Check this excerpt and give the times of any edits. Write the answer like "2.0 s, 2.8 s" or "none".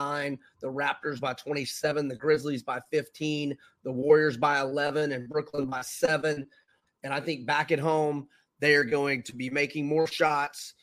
6.9 s